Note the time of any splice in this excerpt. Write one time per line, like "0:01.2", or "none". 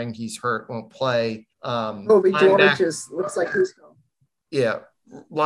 0:01.5